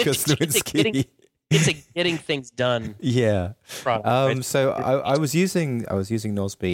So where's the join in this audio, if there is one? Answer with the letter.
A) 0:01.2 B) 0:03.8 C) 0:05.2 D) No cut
D